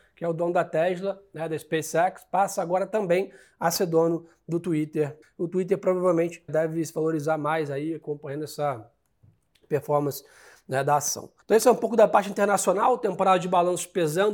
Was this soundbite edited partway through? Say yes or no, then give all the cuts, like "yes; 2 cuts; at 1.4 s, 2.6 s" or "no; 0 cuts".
yes; 3 cuts; at 5.2 s, 6.5 s, 11.4 s